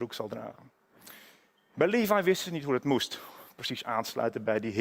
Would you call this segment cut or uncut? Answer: uncut